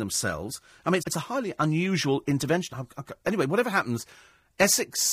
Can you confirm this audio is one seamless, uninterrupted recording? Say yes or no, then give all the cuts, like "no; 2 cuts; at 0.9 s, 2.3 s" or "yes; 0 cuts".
no; 2 cuts; at 1.0 s, 2.7 s